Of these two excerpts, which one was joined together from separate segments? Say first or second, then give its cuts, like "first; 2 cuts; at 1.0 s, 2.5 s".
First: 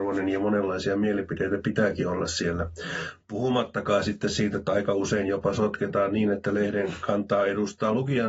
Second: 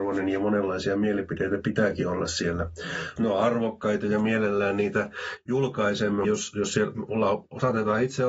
second; 2 cuts; at 3.2 s, 6.2 s